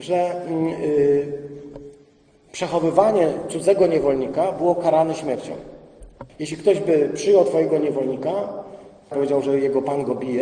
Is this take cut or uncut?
cut